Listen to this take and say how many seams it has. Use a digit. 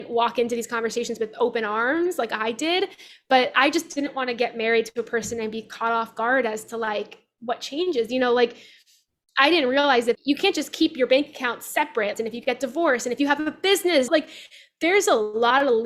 3